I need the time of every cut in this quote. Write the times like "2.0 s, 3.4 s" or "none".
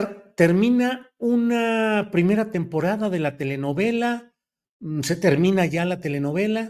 none